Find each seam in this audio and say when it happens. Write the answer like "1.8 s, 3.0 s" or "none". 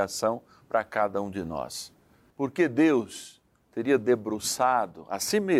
2.3 s

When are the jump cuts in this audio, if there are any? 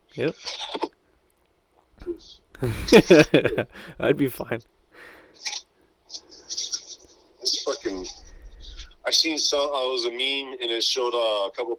none

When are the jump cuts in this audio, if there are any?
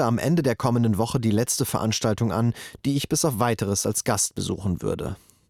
none

